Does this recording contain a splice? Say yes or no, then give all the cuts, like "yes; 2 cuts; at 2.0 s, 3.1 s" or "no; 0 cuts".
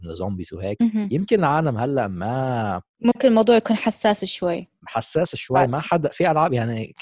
no; 0 cuts